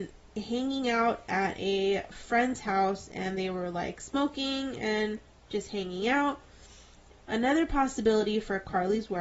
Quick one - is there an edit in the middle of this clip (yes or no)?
yes